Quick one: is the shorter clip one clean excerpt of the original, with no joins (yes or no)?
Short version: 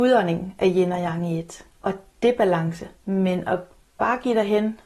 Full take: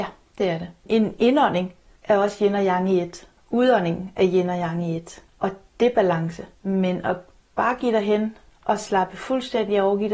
yes